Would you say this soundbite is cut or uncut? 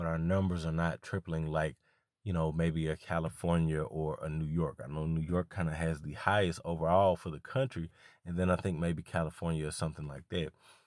uncut